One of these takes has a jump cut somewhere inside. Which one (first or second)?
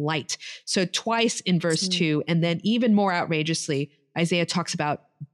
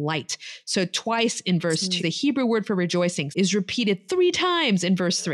second